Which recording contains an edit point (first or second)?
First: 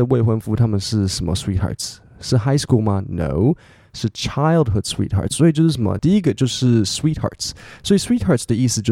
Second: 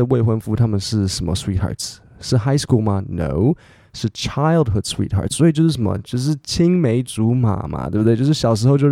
first